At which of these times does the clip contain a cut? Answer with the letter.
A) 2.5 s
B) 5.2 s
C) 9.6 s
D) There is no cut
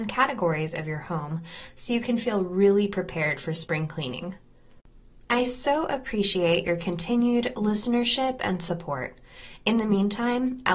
D